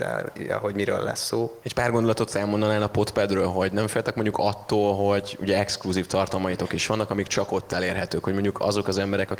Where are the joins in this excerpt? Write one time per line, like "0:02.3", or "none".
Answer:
0:01.6